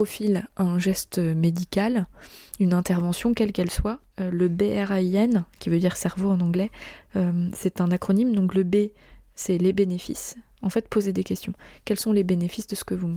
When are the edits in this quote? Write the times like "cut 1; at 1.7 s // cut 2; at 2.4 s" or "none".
none